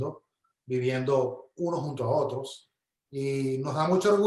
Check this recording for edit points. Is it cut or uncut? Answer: uncut